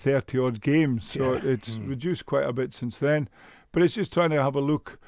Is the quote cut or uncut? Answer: uncut